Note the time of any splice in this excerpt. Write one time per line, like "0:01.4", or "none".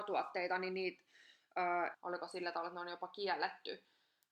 0:01.9